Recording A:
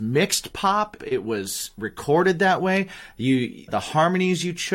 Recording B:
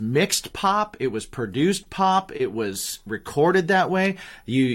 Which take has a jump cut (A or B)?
A